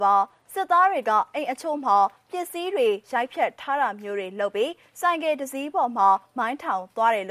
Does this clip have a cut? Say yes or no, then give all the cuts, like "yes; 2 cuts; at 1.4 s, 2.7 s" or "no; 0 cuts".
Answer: no; 0 cuts